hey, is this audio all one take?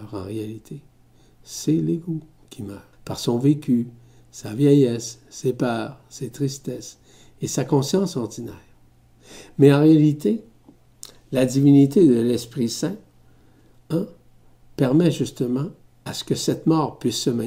no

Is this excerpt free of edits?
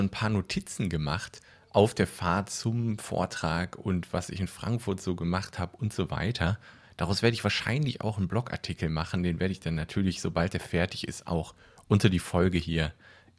yes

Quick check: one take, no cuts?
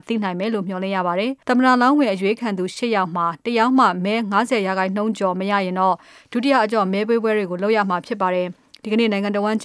no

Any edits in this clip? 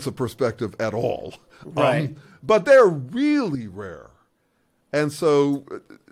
no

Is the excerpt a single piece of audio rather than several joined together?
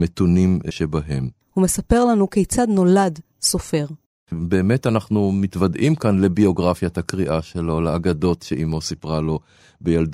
no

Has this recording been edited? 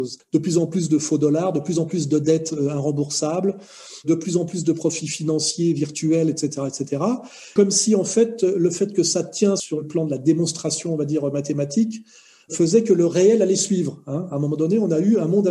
no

